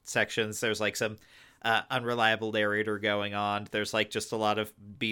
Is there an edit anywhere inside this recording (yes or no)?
no